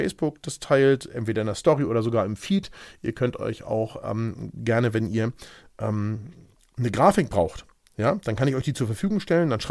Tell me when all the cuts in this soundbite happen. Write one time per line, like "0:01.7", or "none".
none